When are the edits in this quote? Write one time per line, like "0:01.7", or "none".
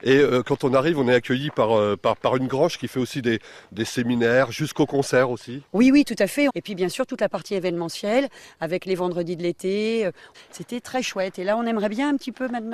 0:06.5
0:10.3